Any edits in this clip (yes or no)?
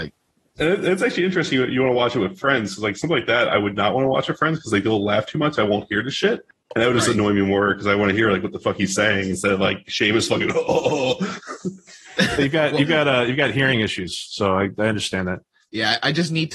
no